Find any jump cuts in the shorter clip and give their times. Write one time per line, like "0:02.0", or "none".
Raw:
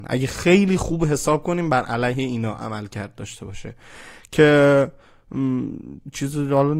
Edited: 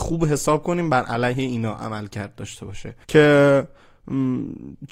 0:03.0